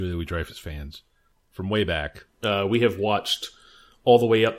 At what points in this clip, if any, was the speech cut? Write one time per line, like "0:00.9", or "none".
0:02.3